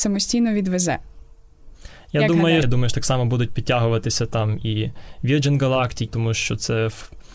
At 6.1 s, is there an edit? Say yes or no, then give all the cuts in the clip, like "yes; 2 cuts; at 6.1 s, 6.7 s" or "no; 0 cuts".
yes; 2 cuts; at 2.6 s, 6.1 s